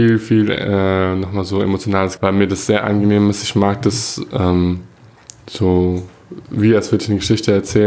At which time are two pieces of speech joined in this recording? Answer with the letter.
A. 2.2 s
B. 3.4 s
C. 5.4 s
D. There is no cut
A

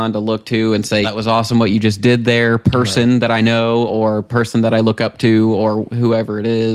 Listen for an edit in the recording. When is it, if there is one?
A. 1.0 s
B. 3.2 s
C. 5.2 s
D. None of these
A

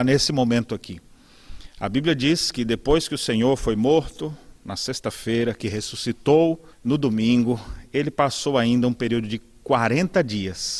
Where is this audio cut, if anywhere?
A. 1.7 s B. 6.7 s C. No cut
B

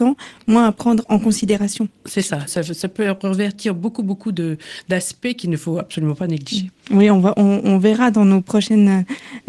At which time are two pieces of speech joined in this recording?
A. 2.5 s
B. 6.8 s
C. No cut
A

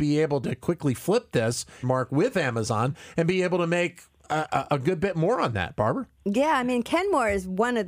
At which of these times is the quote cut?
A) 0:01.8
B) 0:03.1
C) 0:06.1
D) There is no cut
A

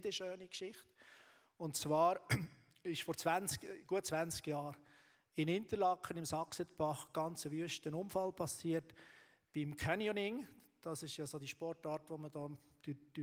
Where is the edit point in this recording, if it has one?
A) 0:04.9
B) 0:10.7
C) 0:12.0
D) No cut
D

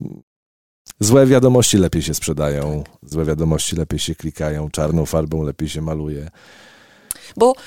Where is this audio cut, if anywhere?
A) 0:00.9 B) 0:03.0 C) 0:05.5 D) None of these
D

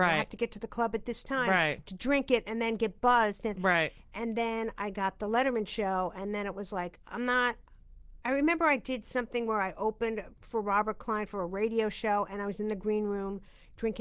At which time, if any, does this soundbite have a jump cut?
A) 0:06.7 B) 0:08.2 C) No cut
B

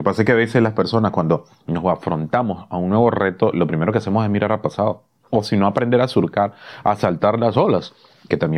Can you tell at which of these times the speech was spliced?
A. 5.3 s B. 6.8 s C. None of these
A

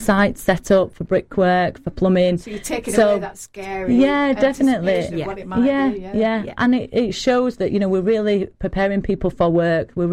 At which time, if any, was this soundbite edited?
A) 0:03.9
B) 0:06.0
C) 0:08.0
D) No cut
D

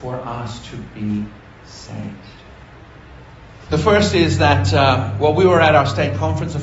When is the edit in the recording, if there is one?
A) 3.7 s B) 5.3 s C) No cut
A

